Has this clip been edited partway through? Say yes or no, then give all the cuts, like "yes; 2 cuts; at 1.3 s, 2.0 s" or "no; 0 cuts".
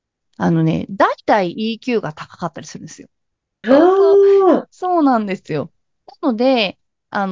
yes; 1 cut; at 3.6 s